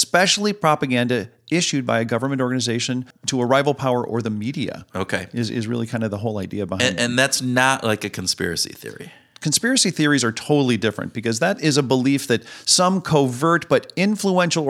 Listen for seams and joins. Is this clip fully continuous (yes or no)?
yes